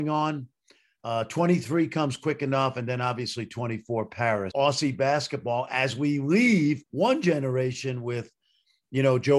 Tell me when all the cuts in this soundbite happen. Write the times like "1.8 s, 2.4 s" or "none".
4.5 s, 6.9 s